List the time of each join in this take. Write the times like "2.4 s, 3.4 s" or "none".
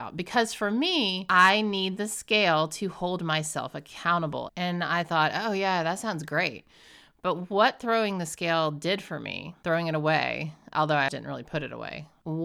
4.5 s, 11.1 s